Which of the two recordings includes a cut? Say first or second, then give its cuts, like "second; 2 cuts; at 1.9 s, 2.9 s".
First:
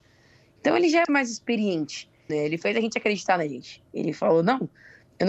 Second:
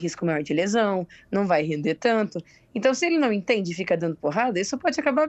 first; 2 cuts; at 1.0 s, 2.3 s